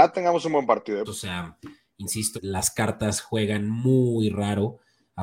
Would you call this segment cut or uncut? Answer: cut